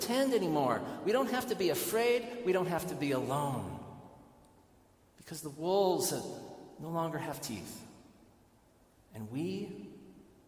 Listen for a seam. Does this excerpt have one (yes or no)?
no